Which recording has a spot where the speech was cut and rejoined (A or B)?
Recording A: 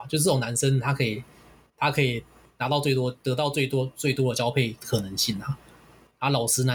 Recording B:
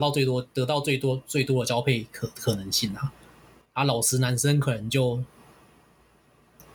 A